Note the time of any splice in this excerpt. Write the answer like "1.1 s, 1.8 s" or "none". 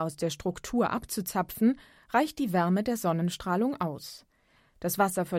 none

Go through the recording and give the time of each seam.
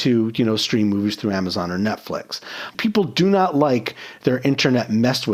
2.7 s

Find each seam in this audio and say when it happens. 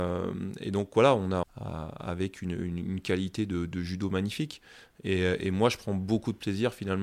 1.4 s

